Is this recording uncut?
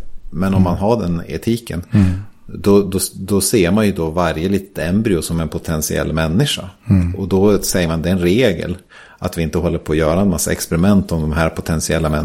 yes; 0 cuts

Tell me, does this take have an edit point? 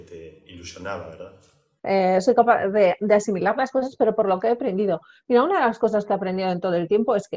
yes; 1 cut; at 1.8 s

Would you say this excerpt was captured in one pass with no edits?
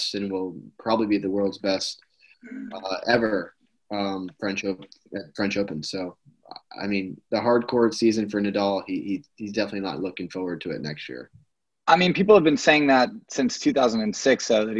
yes; 0 cuts

